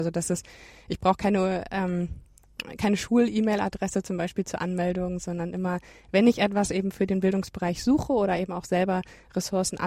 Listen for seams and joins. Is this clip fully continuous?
yes; 0 cuts

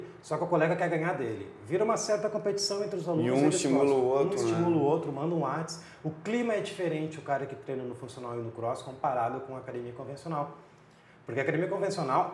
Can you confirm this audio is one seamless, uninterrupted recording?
yes; 0 cuts

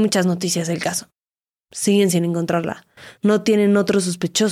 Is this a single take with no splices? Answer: yes; 0 cuts

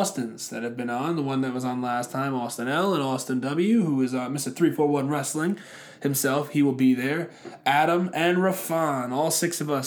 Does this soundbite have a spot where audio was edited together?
no; 0 cuts

